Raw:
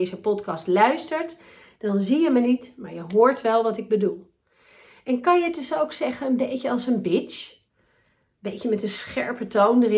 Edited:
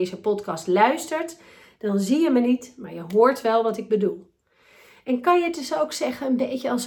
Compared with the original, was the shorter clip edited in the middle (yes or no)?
no